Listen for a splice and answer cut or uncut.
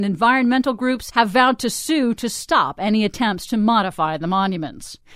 uncut